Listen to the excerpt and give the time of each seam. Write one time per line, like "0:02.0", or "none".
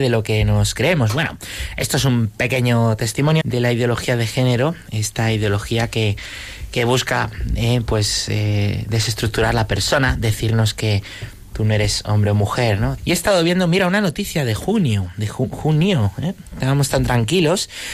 0:03.4
0:13.0